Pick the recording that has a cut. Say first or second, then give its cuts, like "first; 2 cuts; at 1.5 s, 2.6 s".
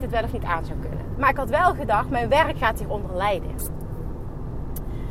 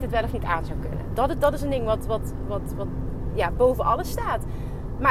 first; 2 cuts; at 1.2 s, 2.5 s